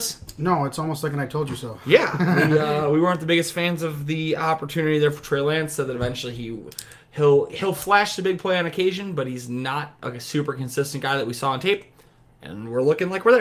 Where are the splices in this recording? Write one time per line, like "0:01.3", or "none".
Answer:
none

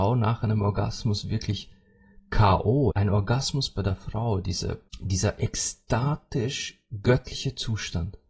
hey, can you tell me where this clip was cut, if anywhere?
0:02.9
0:04.9

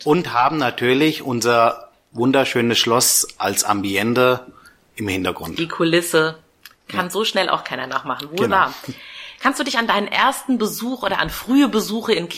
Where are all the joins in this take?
none

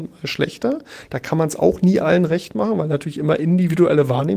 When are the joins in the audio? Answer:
none

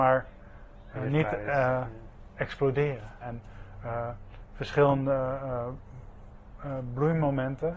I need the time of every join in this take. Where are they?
0:03.2

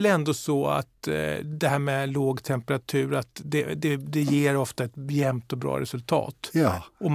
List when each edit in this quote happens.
none

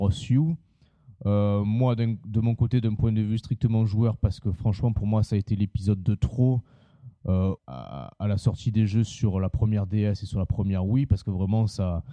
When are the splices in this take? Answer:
0:07.6

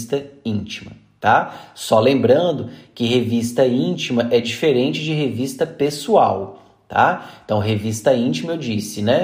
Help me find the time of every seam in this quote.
none

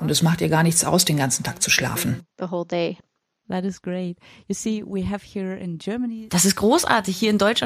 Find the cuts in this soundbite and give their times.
none

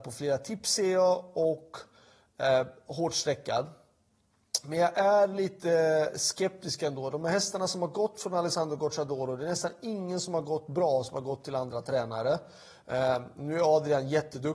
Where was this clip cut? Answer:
none

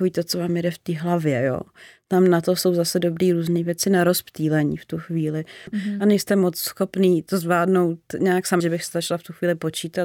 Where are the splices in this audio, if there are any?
0:05.7
0:08.6

